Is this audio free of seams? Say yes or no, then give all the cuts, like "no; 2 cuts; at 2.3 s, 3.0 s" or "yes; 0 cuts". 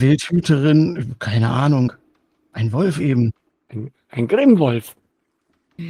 yes; 0 cuts